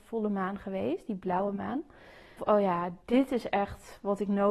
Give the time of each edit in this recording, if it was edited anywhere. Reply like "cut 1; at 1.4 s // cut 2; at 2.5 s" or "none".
cut 1; at 2.4 s